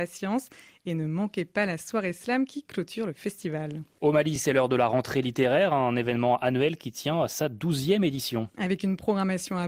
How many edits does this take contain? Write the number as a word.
zero